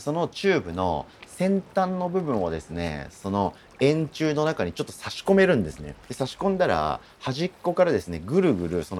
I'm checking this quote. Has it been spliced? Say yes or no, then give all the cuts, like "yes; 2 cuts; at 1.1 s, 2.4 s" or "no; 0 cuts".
yes; 1 cut; at 6.0 s